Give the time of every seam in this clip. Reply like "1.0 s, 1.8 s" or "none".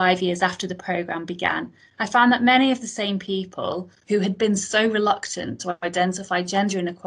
4.0 s